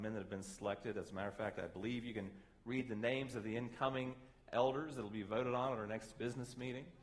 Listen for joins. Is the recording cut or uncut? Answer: uncut